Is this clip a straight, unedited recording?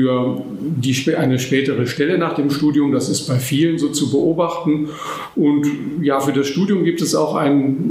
yes; 0 cuts

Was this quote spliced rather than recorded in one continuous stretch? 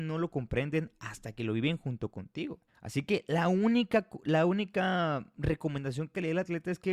yes; 1 cut; at 2.7 s

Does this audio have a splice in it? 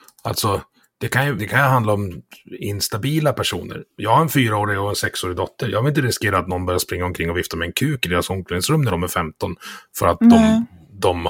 yes; 1 cut; at 1.4 s

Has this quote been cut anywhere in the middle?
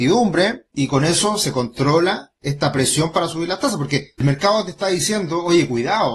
no; 0 cuts

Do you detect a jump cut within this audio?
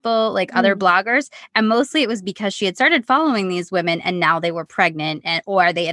no; 0 cuts

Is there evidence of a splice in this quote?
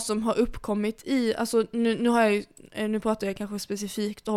no; 0 cuts

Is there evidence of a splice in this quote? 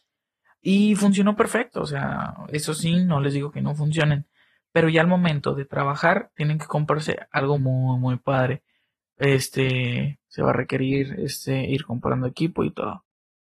yes; 2 cuts; at 7.6 s, 10.3 s

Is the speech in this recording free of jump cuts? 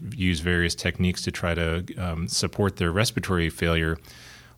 yes; 0 cuts

